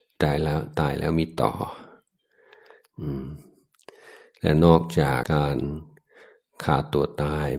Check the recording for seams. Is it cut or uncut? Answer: cut